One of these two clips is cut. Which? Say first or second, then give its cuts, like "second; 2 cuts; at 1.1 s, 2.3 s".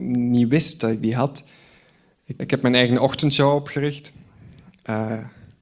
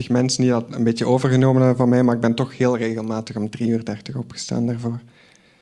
first; 1 cut; at 2.4 s